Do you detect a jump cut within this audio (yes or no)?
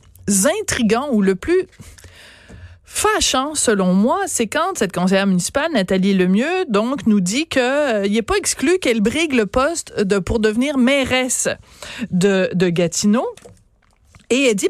no